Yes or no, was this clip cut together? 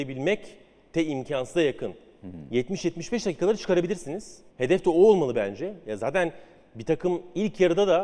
yes